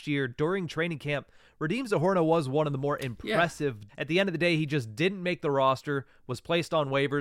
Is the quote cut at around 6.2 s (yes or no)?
no